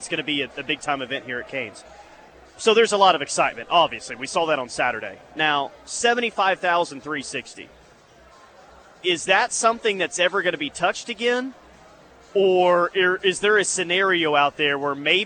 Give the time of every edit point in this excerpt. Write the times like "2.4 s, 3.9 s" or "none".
none